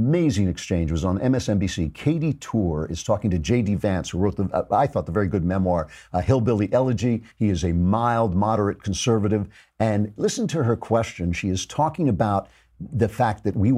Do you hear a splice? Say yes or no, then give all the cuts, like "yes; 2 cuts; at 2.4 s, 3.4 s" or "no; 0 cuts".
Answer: no; 0 cuts